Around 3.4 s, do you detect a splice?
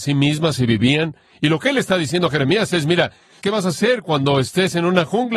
yes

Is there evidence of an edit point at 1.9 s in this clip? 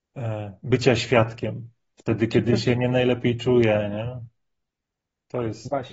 yes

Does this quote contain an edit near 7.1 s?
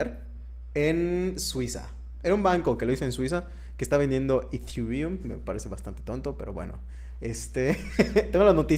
no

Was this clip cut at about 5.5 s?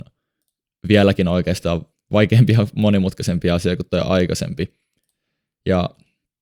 no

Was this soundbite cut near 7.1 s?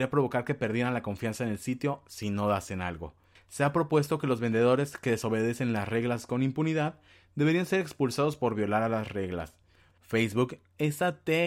no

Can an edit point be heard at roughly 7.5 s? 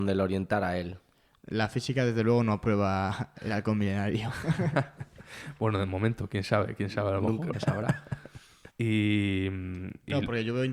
yes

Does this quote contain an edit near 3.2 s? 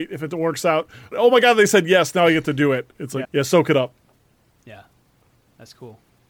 yes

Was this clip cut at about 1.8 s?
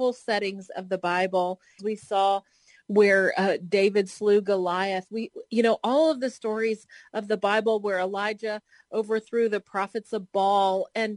yes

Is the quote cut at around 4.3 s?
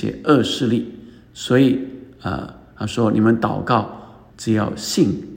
yes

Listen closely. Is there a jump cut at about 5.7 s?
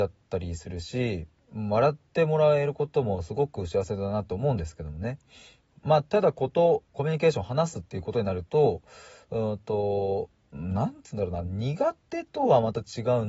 no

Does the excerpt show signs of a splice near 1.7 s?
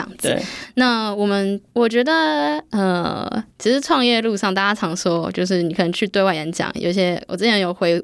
yes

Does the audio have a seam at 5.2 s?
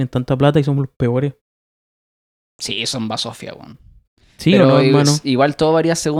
no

